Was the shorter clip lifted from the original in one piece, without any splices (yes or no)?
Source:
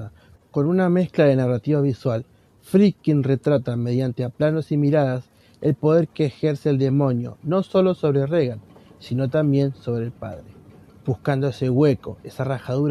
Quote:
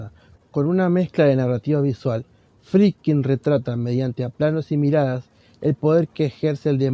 yes